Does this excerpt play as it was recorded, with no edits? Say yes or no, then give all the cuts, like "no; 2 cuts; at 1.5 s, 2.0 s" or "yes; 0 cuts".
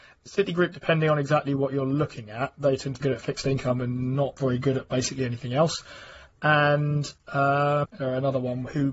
no; 2 cuts; at 3.0 s, 7.8 s